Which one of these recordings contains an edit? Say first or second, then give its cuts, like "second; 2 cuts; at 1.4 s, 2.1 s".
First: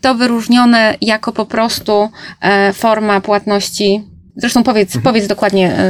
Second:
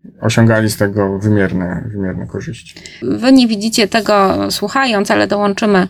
second; 1 cut; at 3.0 s